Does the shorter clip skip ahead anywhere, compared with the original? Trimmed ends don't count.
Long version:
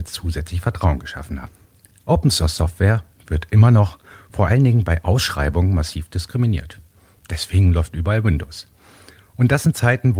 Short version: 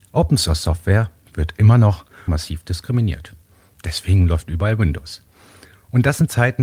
yes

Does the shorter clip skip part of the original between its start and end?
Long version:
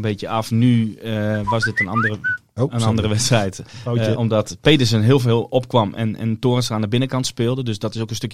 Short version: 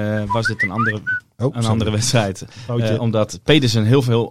no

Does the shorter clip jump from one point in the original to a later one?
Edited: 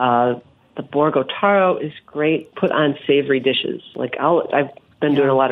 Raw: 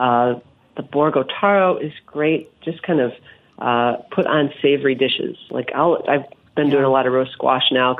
yes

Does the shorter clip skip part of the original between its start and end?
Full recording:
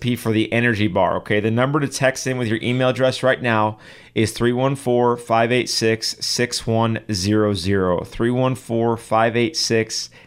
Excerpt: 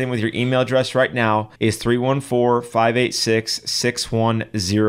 yes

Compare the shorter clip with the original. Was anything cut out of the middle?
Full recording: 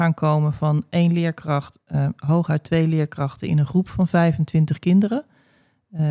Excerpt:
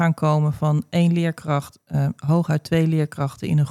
no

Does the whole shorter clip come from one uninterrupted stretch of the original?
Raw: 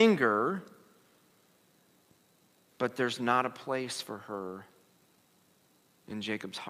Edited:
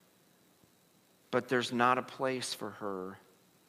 yes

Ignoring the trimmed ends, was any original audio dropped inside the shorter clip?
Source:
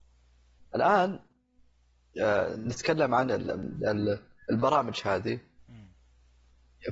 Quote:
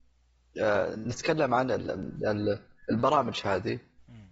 no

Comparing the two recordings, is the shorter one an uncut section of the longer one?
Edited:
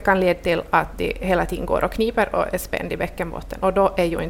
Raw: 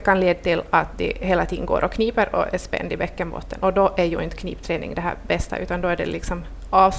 yes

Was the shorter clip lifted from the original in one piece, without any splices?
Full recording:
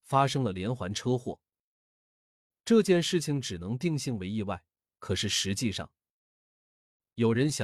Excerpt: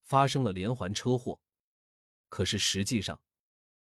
no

